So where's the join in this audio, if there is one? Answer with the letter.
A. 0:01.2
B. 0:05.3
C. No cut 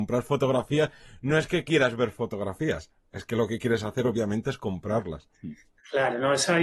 B